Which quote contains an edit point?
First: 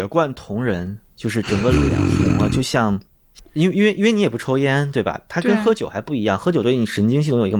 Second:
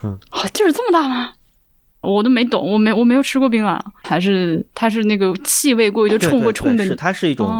second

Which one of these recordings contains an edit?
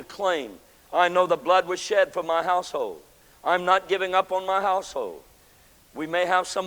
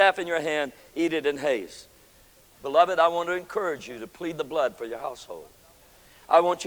second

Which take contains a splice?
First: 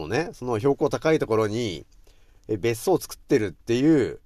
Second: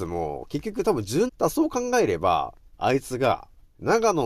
second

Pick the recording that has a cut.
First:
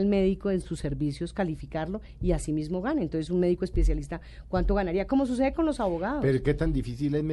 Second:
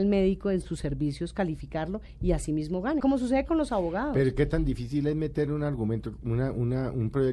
second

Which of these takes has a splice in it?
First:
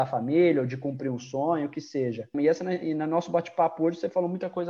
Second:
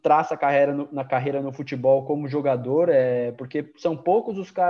first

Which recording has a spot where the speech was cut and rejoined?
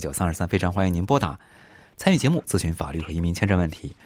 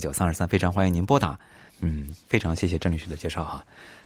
second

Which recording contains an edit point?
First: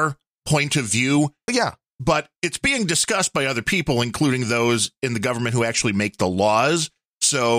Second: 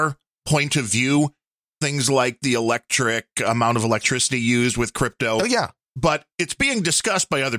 first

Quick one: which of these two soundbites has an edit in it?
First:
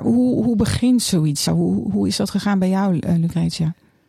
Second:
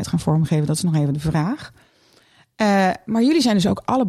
first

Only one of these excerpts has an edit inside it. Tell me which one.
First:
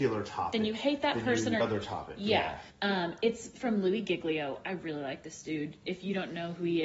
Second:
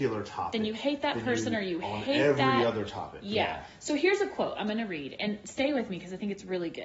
first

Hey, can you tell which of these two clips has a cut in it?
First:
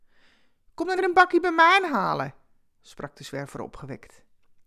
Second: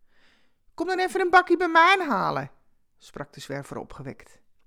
first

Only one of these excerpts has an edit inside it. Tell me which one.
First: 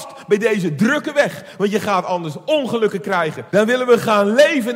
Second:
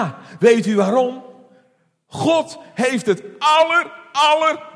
first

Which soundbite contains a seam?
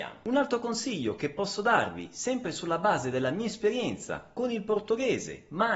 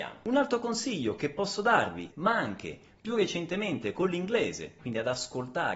second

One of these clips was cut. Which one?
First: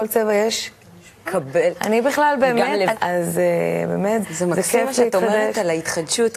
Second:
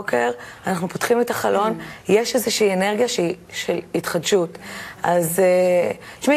first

